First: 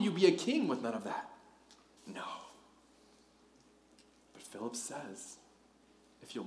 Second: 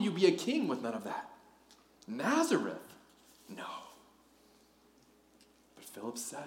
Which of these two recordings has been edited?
first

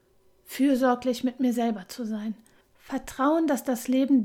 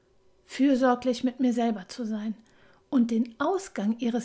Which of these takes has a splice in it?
first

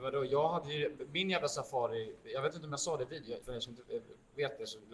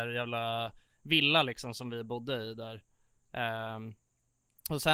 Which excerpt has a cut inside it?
first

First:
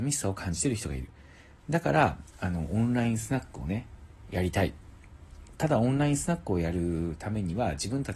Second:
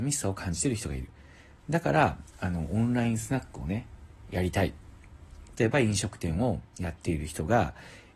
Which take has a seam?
second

